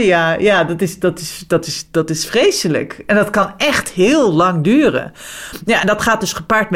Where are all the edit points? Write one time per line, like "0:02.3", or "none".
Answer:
none